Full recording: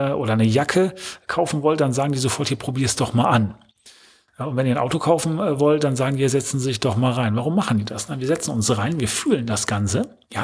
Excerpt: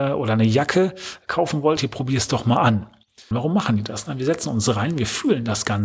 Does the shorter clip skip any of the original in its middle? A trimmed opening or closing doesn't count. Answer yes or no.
yes